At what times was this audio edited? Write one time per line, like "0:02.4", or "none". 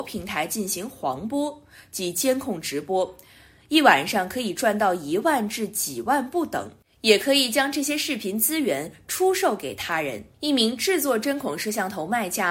0:10.3